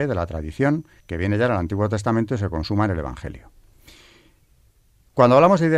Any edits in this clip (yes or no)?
yes